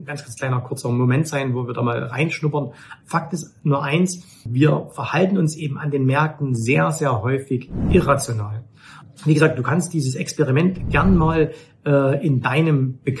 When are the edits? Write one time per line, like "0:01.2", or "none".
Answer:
0:03.0